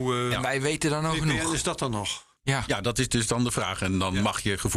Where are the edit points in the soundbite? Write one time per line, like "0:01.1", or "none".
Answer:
0:02.4